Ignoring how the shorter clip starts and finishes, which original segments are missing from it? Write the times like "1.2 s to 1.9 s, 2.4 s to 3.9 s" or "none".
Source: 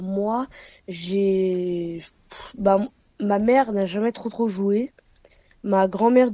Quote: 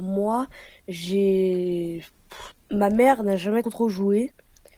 2.5 s to 3.0 s, 4.1 s to 4.2 s